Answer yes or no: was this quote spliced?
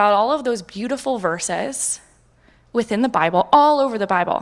no